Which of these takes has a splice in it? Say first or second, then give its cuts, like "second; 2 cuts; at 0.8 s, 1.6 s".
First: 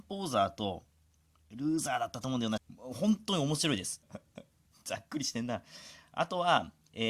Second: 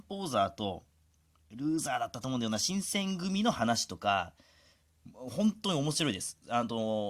first; 2 cuts; at 2.6 s, 4.0 s